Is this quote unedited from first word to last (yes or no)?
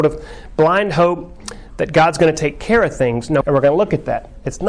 no